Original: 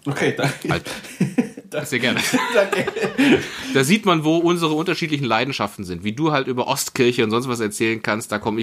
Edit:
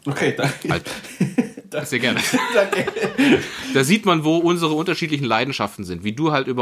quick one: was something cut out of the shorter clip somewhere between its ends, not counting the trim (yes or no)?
no